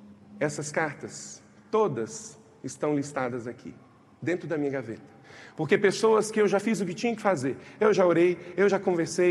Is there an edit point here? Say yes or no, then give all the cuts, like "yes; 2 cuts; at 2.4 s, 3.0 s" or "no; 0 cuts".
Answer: no; 0 cuts